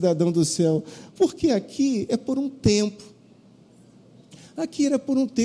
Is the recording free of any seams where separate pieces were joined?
no; 1 cut; at 1.1 s

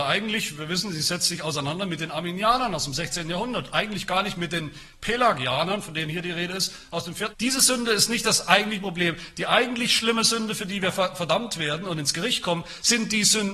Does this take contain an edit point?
yes; 1 cut; at 7.3 s

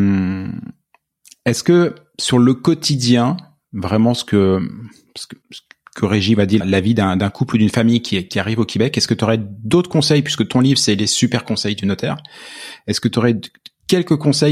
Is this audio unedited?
no; 2 cuts; at 5.4 s, 6.6 s

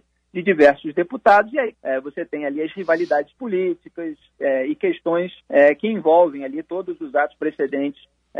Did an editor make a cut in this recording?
yes; 2 cuts; at 1.7 s, 5.4 s

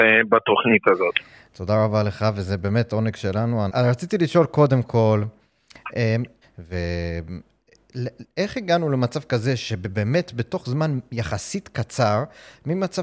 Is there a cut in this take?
yes; 2 cuts; at 3.7 s, 6.4 s

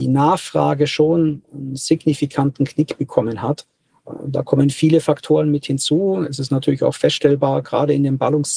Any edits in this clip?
no; 0 cuts

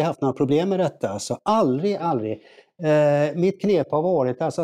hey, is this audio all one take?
no; 1 cut; at 2.0 s

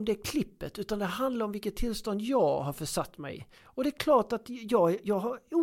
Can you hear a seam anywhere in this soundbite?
no; 0 cuts

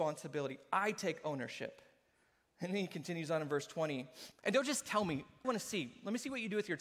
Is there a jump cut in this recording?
yes; 2 cuts; at 4.3 s, 5.4 s

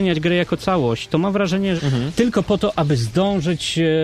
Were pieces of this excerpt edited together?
yes; 1 cut; at 1.8 s

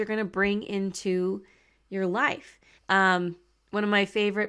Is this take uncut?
no; 1 cut; at 2.8 s

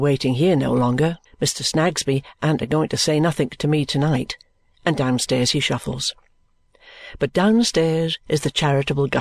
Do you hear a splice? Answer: yes; 1 cut; at 1.3 s

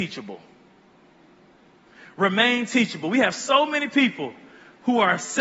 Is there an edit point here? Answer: no; 0 cuts

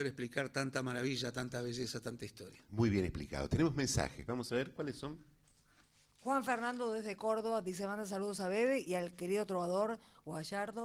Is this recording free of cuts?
yes; 0 cuts

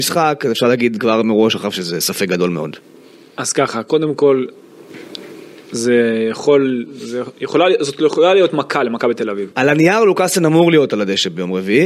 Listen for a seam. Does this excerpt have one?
yes; 1 cut; at 9.5 s

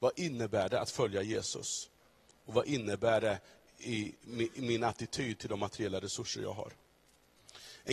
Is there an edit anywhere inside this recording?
no; 0 cuts

